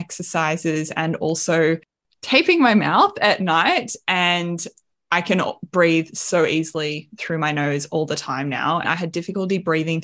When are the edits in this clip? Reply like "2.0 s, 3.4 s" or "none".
8.8 s